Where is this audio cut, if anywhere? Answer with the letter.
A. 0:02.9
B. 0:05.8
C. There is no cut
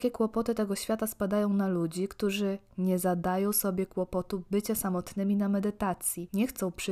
C